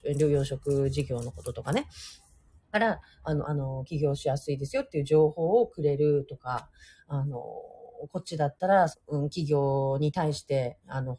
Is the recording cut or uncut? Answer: cut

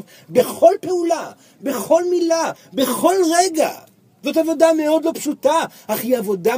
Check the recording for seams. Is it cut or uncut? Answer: uncut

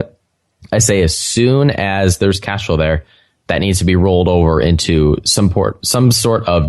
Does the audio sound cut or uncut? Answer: uncut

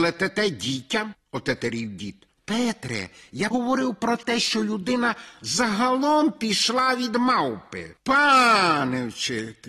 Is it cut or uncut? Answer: cut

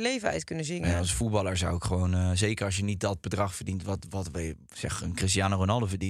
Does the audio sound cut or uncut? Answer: uncut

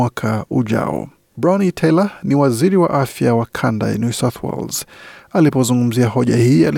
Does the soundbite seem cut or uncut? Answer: uncut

